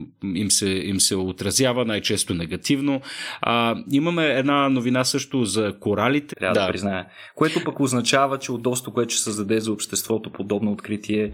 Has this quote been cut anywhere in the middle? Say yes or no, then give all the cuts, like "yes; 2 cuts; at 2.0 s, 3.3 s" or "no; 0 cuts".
yes; 1 cut; at 6.3 s